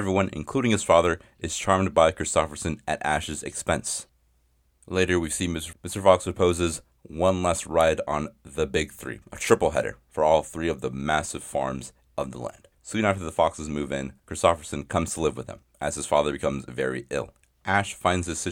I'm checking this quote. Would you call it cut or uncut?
cut